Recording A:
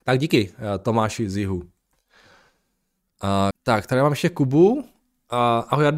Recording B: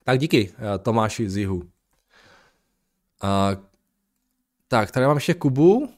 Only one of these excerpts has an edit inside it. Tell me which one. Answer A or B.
A